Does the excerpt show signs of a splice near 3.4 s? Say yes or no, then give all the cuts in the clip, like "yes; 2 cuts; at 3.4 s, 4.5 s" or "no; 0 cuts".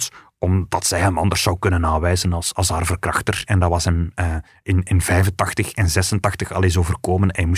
no; 0 cuts